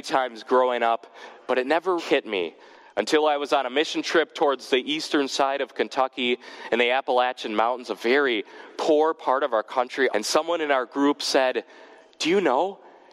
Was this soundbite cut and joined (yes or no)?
yes